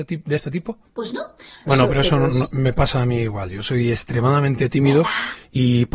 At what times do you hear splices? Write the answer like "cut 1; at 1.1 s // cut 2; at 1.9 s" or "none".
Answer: cut 1; at 1.7 s